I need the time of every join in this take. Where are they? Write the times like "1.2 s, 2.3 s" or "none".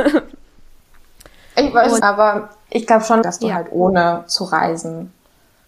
2.0 s, 3.2 s